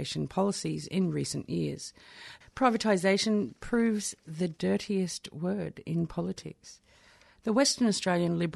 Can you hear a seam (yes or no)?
yes